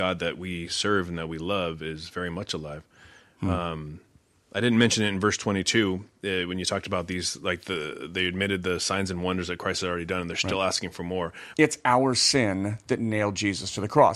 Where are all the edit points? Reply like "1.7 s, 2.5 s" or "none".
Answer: 11.5 s